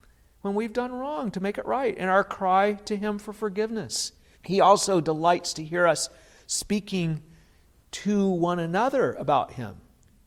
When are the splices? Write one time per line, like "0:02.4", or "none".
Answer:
0:04.3